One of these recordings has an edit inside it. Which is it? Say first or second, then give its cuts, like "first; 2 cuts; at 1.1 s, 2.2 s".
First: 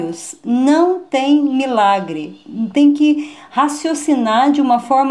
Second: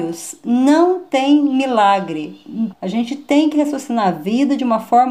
second; 1 cut; at 2.7 s